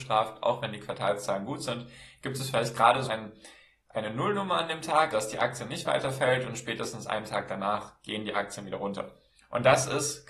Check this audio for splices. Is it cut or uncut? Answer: cut